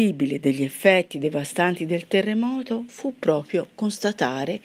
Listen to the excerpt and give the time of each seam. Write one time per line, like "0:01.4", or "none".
none